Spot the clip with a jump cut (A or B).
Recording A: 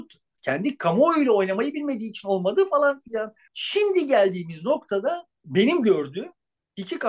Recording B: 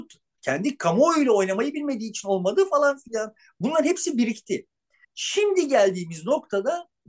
A